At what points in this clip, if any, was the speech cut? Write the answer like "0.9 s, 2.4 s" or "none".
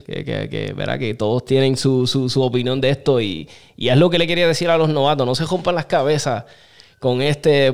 none

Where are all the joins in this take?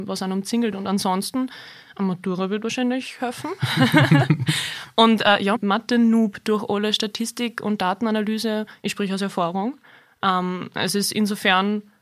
5.5 s, 8.8 s

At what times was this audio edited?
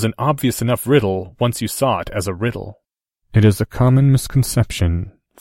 3.2 s

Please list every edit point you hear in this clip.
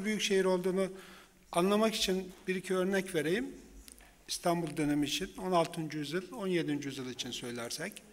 none

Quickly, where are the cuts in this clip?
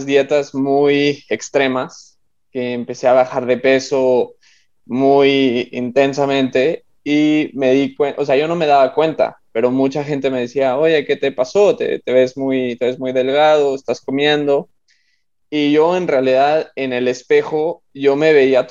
none

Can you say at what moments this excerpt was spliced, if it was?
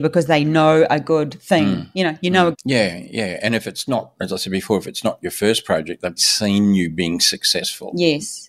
2.5 s, 6.2 s

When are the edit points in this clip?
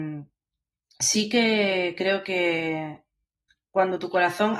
none

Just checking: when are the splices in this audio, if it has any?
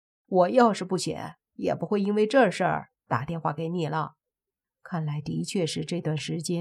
4.6 s

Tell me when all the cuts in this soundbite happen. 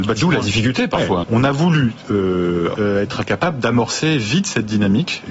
1.2 s, 2.8 s

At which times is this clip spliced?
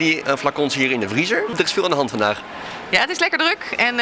1.5 s

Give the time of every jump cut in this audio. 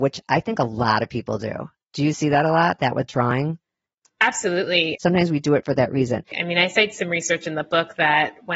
4.9 s, 6.3 s

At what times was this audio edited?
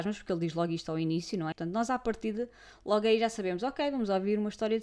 1.5 s

